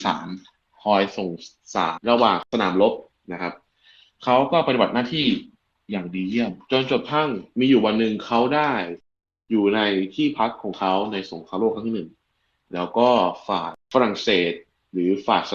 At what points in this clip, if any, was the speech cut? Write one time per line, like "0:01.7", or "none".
0:02.0

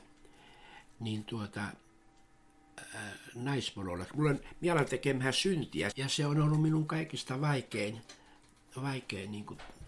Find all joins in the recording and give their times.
0:05.9

